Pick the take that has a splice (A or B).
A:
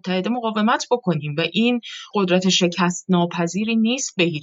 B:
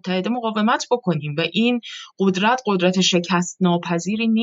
A